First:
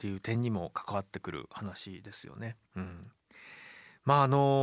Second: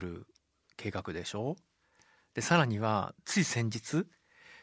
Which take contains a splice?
first; 1 cut; at 2.7 s

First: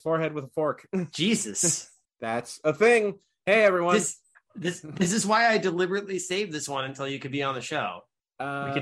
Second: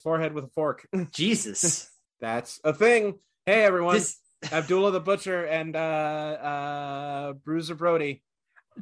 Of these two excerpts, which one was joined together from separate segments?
first; 1 cut; at 4.3 s

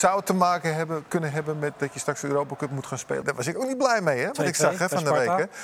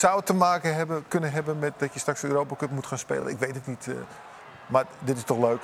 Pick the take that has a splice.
first; 1 cut; at 3.2 s

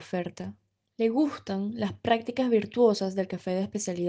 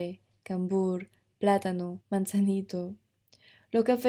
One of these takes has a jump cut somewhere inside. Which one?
second; 1 cut; at 2.0 s

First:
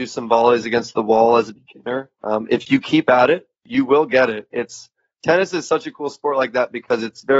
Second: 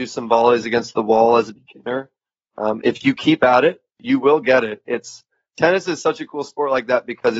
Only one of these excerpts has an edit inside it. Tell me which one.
first; 1 cut; at 2.1 s

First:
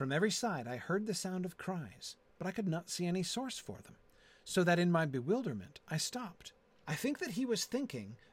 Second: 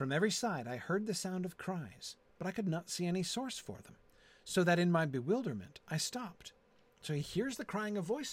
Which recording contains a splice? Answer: first; 1 cut; at 6.8 s

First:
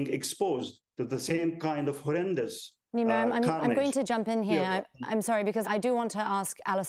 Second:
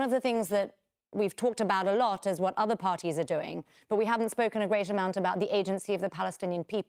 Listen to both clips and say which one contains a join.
first; 1 cut; at 5.6 s

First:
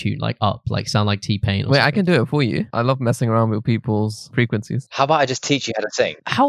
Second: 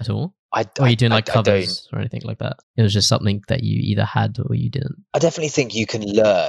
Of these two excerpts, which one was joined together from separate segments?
second; 1 cut; at 2.6 s

